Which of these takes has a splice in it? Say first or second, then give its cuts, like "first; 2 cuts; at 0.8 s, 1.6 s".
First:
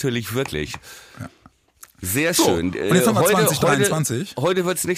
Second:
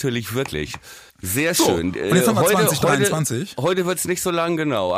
second; 1 cut; at 1.1 s